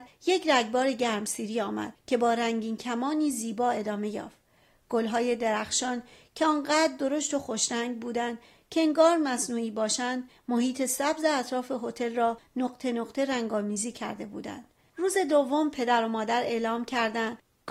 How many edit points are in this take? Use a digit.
1